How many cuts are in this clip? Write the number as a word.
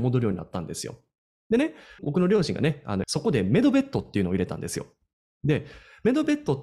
two